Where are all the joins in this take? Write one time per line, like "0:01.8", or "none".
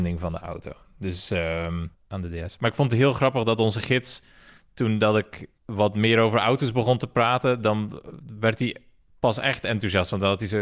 none